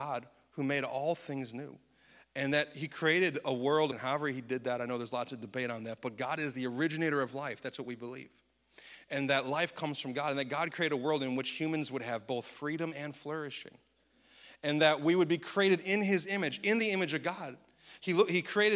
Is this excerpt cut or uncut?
cut